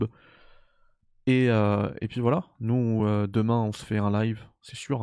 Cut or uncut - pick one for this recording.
uncut